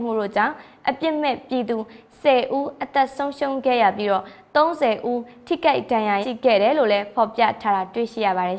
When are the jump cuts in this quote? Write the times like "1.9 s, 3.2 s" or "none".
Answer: 6.2 s